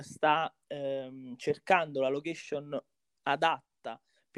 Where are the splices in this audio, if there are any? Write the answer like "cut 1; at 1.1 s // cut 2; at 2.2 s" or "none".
none